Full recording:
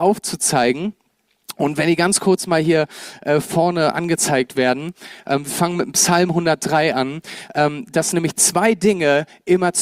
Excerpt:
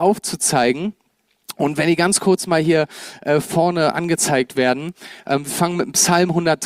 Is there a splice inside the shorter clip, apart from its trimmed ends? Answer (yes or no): no